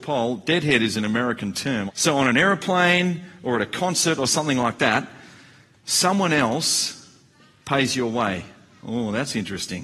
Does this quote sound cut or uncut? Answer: cut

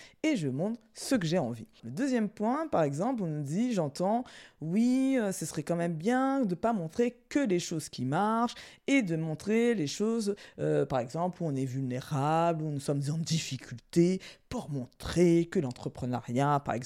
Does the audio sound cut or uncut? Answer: cut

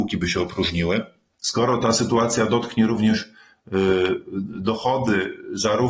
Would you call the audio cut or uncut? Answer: cut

